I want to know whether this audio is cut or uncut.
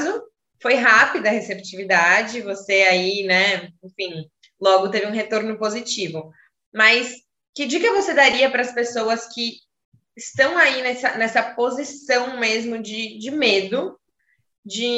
uncut